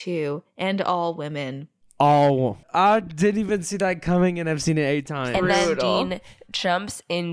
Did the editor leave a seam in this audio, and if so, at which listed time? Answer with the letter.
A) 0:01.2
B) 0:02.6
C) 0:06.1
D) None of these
B